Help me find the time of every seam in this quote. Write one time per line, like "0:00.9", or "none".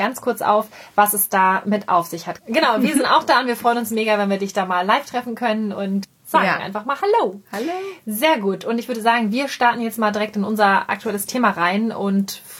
0:02.4